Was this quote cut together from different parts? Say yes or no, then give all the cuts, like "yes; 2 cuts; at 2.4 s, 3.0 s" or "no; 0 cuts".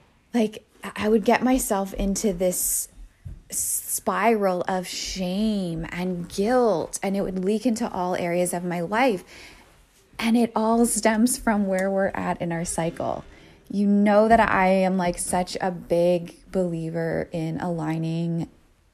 no; 0 cuts